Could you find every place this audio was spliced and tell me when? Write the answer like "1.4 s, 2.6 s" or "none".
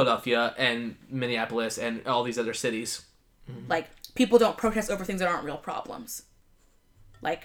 3.4 s